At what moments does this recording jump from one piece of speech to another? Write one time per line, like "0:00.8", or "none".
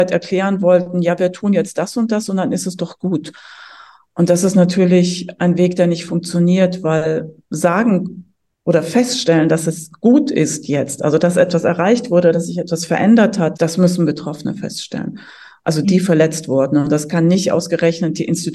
0:07.4
0:13.5
0:15.8